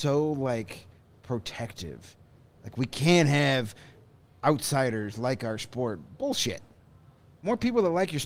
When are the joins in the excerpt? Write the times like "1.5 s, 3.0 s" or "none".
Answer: none